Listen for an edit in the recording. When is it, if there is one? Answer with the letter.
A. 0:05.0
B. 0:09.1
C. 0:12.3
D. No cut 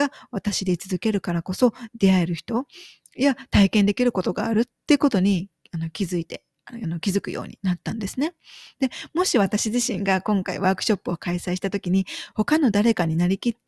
C